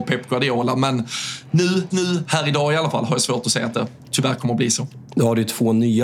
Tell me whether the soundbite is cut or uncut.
cut